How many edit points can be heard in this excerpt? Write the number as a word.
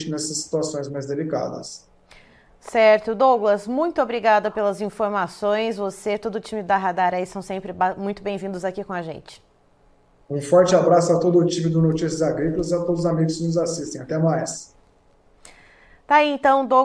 one